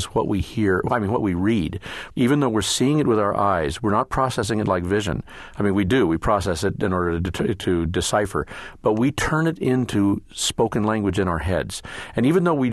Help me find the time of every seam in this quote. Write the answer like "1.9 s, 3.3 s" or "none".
2.1 s